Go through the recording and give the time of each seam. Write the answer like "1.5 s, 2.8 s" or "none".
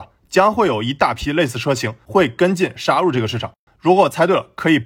3.7 s